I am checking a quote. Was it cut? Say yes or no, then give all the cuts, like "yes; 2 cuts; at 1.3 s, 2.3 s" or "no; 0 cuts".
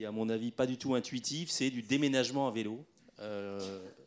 yes; 1 cut; at 3.0 s